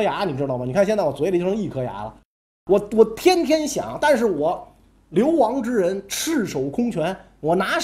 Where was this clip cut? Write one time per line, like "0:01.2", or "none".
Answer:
none